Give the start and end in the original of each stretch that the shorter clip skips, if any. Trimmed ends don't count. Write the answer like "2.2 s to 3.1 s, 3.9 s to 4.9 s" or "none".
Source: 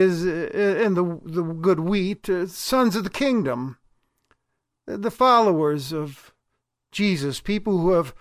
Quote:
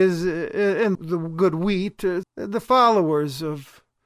0.9 s to 1.2 s, 2.5 s to 4.7 s